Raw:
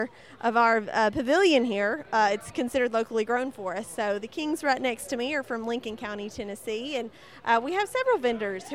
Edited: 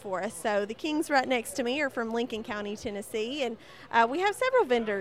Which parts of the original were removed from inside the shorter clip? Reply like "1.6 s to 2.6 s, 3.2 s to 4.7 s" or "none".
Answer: none

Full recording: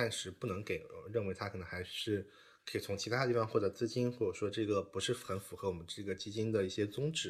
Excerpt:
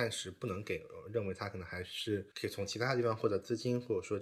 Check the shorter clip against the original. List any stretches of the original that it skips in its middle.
2.3 s to 2.6 s

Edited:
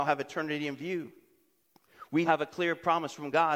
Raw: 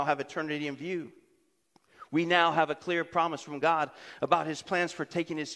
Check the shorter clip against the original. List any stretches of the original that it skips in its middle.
2.3 s to 2.5 s

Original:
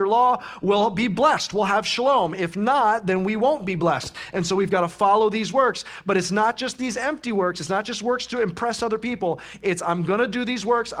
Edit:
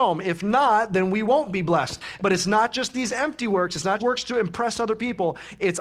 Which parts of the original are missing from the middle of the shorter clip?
4.3 s to 6.0 s, 7.8 s to 8.0 s

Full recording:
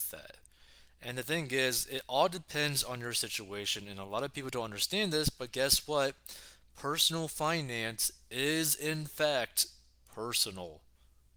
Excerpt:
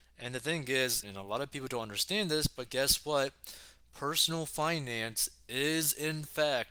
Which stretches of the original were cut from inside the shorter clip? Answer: 1.9 s to 3.9 s

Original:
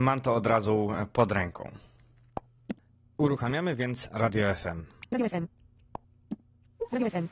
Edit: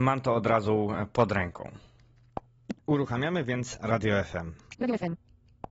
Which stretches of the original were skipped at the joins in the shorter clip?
2.8 s to 3.1 s

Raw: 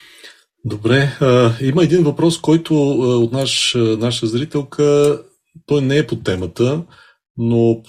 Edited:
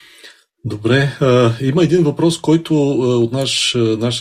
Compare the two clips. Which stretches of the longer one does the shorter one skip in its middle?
none

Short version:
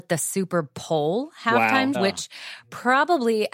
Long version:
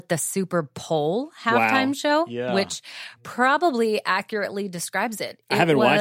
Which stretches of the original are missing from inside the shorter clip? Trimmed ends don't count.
1.9 s to 2.5 s

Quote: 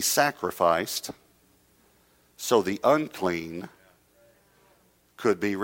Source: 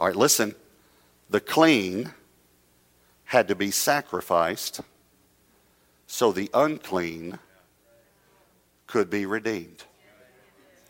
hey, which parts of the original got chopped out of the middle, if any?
none

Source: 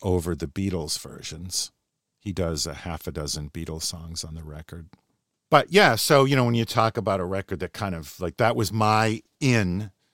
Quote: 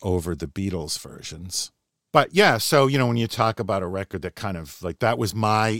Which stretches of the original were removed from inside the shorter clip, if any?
2.0 s to 5.4 s

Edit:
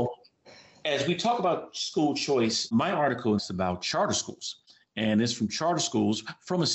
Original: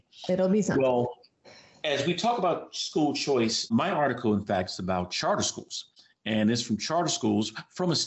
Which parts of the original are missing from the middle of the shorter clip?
4.4 s to 4.7 s

